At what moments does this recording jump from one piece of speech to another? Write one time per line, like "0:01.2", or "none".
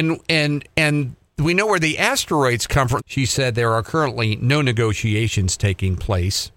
0:03.0